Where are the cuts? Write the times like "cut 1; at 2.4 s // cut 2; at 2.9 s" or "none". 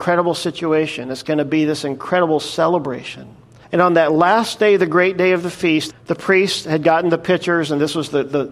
cut 1; at 3.6 s // cut 2; at 5.9 s